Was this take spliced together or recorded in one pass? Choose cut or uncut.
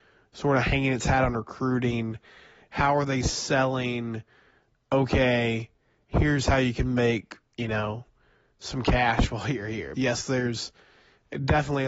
cut